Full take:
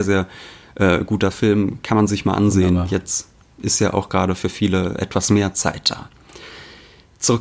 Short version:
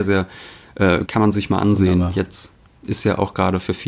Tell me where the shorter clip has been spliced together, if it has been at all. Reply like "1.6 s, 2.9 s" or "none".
1.0 s

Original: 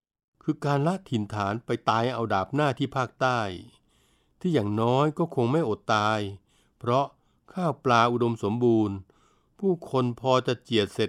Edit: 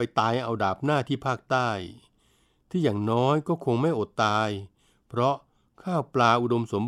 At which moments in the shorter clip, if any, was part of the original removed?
none

